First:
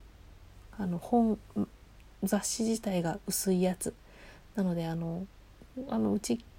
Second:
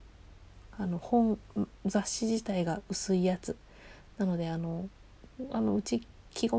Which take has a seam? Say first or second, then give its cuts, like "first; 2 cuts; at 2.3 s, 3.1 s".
second; 1 cut; at 1.8 s